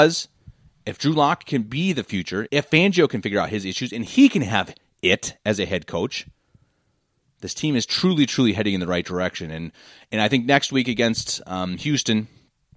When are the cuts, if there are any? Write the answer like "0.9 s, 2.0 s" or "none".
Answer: 2.5 s